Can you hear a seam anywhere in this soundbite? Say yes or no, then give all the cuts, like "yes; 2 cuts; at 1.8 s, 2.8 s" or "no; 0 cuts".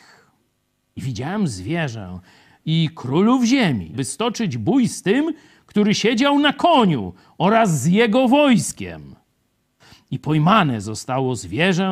yes; 1 cut; at 3.9 s